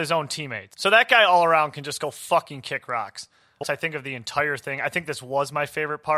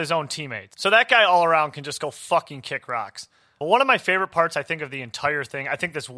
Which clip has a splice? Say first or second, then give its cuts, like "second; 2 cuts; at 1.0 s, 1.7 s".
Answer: first; 1 cut; at 3.6 s